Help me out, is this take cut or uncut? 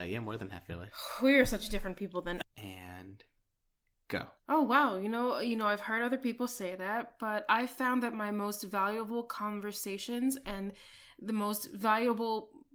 cut